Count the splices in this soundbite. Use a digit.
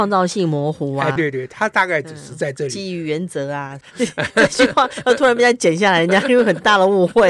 2